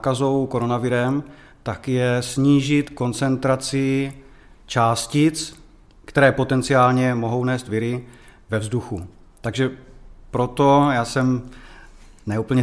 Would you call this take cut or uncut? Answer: uncut